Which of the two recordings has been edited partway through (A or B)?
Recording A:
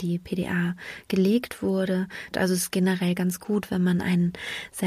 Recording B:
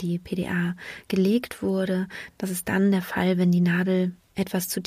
A